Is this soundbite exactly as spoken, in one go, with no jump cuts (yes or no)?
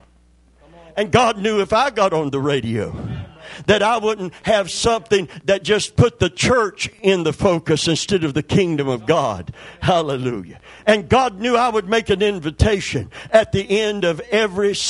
yes